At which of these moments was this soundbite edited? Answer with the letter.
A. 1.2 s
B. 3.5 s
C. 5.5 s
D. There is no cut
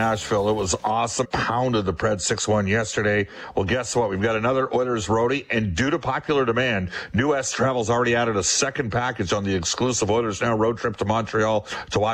A